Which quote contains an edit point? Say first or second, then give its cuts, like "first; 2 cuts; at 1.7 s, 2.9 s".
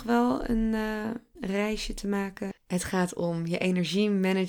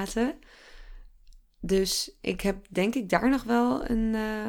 first; 2 cuts; at 1.4 s, 2.5 s